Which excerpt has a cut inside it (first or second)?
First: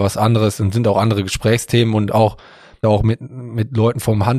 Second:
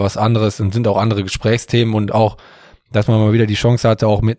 first